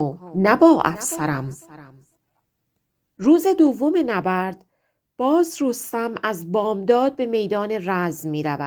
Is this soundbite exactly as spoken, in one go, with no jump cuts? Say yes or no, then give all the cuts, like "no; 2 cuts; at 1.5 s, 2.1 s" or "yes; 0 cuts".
yes; 0 cuts